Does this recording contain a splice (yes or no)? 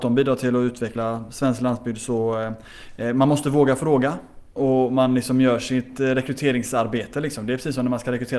no